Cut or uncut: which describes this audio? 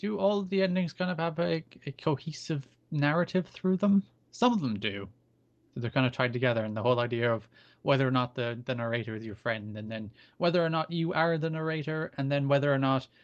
uncut